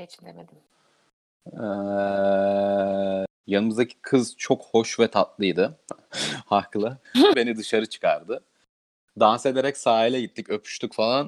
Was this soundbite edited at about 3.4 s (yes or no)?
yes